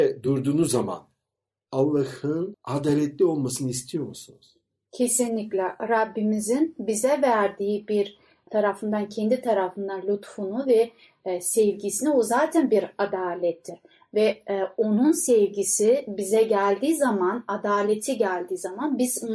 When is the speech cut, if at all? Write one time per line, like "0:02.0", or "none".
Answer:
none